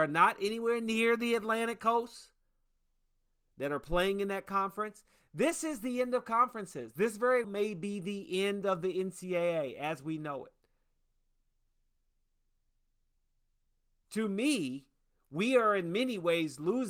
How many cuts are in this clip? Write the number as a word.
one